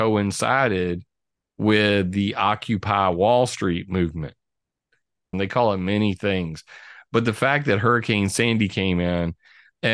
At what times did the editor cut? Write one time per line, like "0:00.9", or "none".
0:05.3